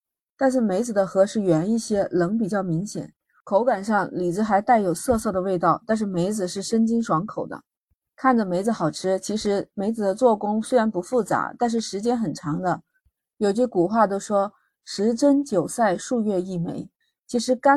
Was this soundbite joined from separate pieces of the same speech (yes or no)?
no